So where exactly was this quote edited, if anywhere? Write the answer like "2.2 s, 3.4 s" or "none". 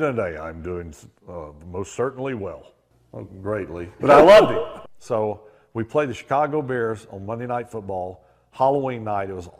4.0 s